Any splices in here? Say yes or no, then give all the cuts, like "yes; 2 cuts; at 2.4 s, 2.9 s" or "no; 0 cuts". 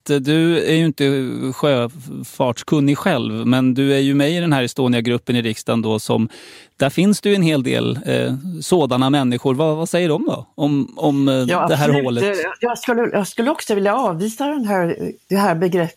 no; 0 cuts